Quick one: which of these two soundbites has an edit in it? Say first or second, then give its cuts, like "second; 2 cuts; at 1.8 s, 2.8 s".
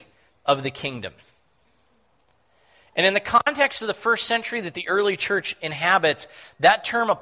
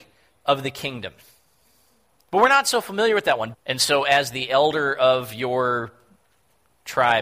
second; 2 cuts; at 2.3 s, 3.5 s